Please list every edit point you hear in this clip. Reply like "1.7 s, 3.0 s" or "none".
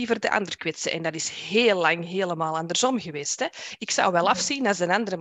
none